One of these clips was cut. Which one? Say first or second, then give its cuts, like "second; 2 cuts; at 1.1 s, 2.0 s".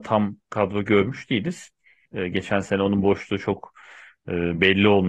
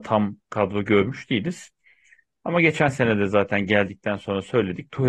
first; 1 cut; at 2.1 s